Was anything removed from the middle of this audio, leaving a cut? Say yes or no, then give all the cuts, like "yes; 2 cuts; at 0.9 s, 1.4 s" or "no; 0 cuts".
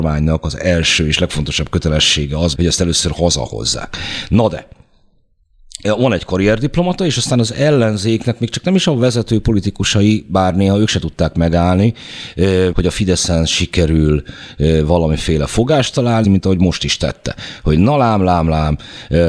yes; 3 cuts; at 2.5 s, 12.7 s, 16.2 s